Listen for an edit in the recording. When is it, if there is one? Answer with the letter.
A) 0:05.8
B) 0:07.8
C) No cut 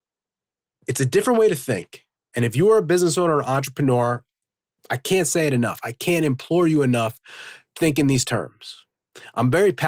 B